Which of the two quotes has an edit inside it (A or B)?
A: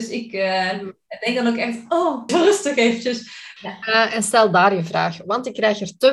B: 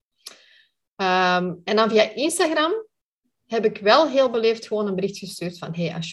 A